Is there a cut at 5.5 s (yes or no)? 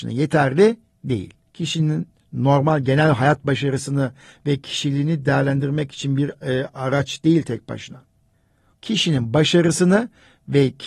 no